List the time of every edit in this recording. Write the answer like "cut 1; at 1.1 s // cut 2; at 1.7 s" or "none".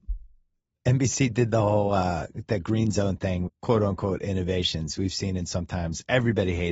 cut 1; at 3.5 s